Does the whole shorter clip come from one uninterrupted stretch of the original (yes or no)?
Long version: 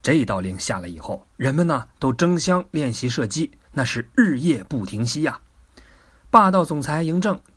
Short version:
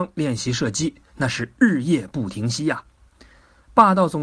yes